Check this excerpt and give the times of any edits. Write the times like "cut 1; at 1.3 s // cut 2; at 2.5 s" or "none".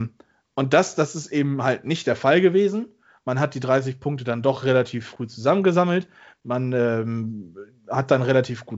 none